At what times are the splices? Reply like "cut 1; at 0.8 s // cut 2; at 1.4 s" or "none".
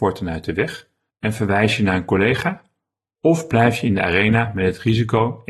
cut 1; at 1.1 s